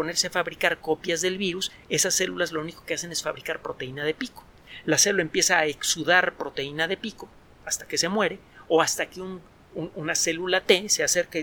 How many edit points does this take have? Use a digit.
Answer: 0